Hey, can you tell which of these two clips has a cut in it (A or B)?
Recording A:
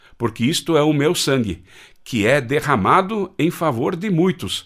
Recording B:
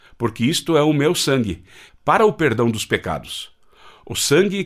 B